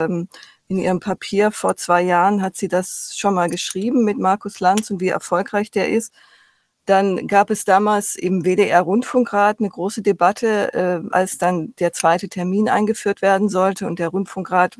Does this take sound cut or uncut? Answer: cut